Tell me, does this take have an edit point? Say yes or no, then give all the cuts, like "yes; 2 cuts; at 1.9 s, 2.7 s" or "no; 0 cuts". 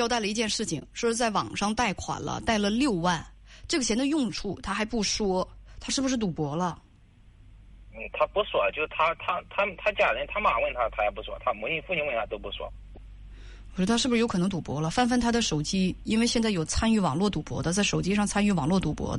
no; 0 cuts